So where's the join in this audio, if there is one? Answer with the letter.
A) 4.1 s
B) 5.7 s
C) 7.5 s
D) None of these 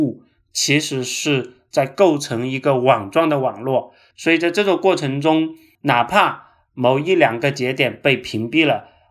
A